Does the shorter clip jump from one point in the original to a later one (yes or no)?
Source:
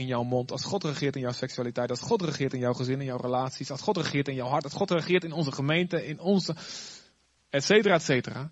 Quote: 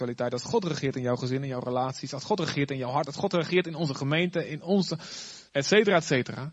yes